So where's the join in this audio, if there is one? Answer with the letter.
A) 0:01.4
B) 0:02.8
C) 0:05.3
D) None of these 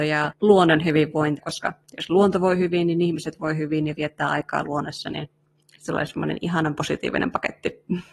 A